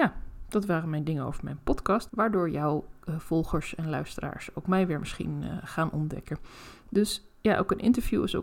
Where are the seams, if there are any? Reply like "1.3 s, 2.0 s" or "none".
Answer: 2.1 s